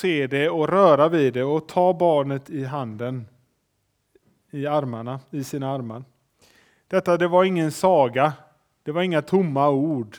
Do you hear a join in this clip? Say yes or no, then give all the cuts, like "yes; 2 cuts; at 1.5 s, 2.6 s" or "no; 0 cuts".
no; 0 cuts